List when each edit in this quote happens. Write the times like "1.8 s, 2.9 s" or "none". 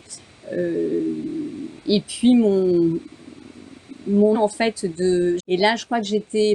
4.3 s, 5.4 s